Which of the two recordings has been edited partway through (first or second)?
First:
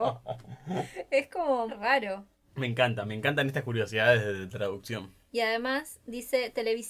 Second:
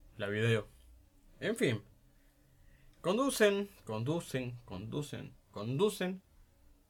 first